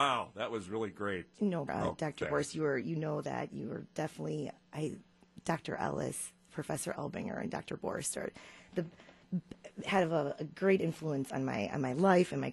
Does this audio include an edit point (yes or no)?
yes